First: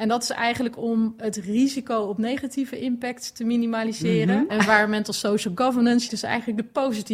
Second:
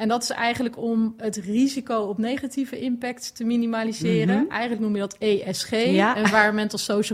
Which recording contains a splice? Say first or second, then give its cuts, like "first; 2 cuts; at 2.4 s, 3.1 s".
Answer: first; 2 cuts; at 4.5 s, 6.1 s